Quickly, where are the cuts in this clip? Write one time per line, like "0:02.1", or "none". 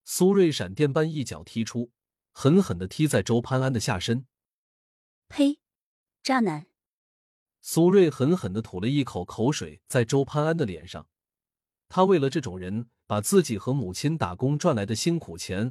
0:05.2

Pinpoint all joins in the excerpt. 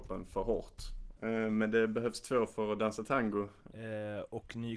0:01.2
0:03.7

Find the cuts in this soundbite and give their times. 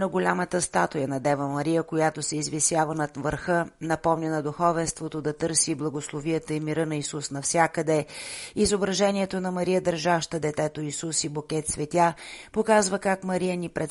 none

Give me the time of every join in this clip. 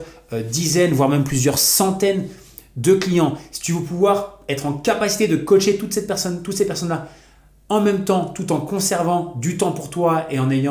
none

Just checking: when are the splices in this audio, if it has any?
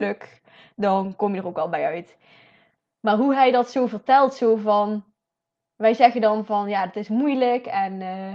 none

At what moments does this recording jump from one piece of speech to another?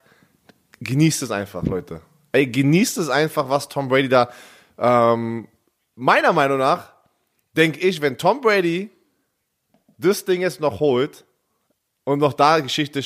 none

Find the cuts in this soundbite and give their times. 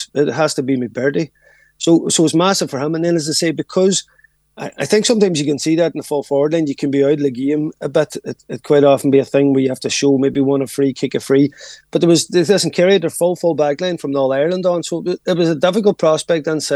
none

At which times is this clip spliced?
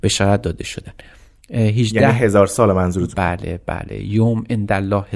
0:03.1

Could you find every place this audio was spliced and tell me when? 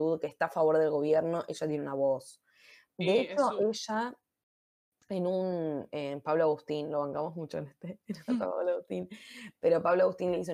0:08.3

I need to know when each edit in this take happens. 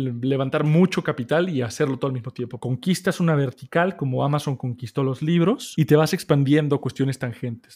0:02.6

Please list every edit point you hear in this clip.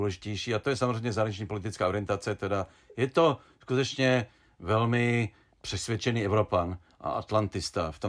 none

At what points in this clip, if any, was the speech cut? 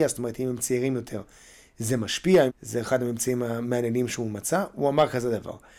0:02.5

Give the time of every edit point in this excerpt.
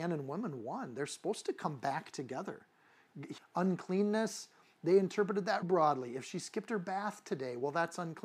0:03.4
0:05.6

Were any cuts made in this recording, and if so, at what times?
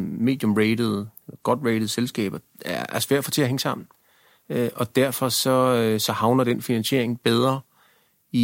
none

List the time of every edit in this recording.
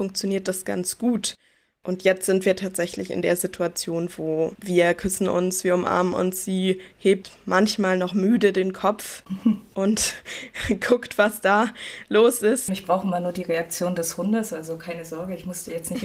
0:12.7

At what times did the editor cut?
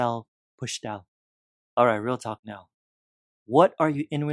0:01.7

